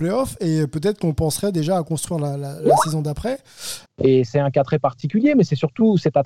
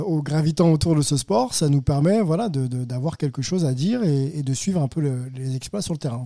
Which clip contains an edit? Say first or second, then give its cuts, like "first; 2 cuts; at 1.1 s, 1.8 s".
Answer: first; 1 cut; at 3.8 s